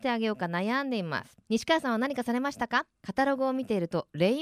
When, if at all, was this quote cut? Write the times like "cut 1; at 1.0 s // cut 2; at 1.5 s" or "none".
cut 1; at 1.4 s // cut 2; at 2.9 s